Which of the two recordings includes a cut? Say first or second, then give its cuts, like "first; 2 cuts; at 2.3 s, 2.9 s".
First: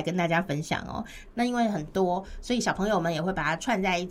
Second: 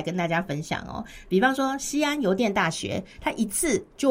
first; 1 cut; at 1.3 s